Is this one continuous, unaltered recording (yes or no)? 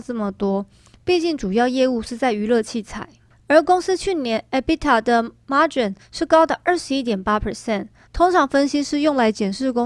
no